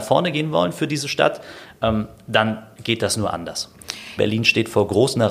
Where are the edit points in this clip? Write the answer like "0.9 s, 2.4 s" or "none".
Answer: 4.2 s